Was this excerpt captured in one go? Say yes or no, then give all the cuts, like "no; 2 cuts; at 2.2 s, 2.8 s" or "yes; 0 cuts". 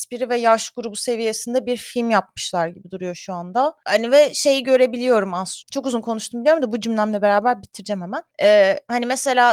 no; 1 cut; at 5.6 s